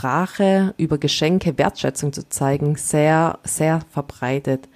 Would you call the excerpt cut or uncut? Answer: uncut